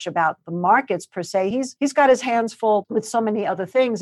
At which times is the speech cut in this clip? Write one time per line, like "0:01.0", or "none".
none